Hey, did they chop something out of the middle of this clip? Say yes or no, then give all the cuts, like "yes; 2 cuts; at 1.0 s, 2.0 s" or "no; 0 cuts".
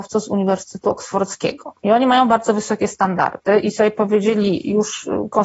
yes; 1 cut; at 1.8 s